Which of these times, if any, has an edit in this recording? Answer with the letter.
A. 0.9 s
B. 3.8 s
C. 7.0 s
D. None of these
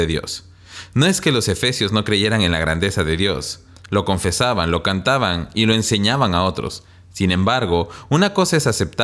B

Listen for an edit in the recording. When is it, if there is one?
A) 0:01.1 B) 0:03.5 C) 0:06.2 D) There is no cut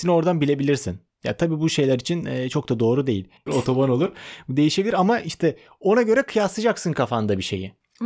B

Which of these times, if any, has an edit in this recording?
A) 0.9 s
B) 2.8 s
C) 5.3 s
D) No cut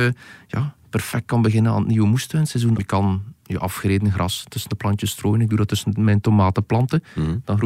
B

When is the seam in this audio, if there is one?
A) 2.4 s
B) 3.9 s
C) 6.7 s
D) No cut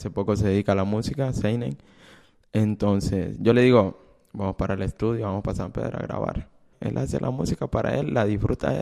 C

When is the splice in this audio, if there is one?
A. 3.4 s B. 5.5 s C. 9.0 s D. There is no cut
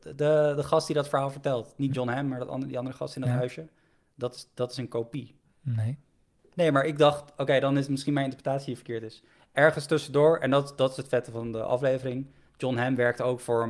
D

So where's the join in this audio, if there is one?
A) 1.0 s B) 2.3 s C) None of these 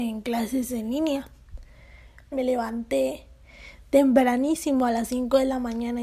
B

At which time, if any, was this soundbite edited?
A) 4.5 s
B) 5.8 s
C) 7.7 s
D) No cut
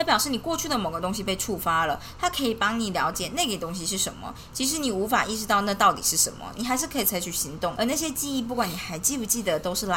C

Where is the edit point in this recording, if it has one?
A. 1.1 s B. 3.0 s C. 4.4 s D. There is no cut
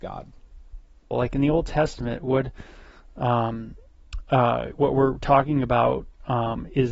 A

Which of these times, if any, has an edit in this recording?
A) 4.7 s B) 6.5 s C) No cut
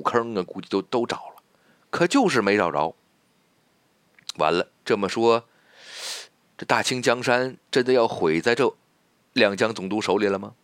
A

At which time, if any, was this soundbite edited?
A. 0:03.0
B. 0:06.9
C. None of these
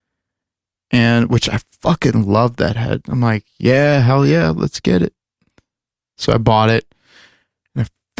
A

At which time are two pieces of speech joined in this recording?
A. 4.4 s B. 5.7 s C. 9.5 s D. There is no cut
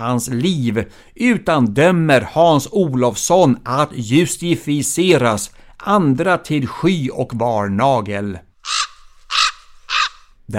B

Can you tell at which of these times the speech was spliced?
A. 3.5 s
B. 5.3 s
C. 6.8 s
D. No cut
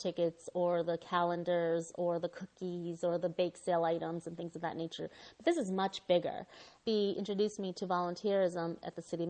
C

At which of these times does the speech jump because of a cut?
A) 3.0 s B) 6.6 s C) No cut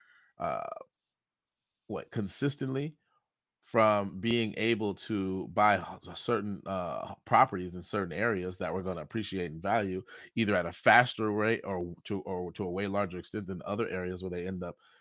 C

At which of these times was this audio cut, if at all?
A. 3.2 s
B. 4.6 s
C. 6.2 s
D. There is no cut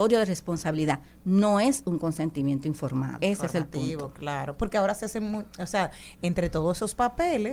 A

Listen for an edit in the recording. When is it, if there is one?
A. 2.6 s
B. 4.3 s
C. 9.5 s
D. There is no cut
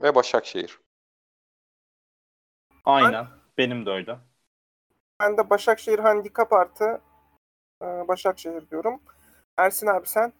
C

